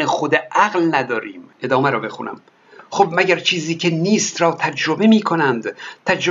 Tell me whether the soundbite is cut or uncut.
cut